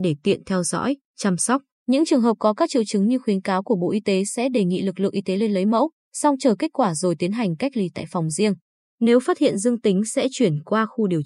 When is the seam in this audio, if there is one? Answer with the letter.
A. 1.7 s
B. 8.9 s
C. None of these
A